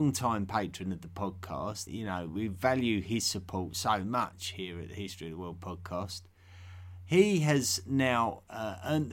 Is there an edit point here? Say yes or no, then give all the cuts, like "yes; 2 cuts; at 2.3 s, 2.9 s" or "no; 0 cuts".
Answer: yes; 1 cut; at 1.9 s